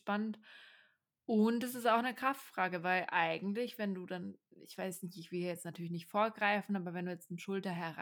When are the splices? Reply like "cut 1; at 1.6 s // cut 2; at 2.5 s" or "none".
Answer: none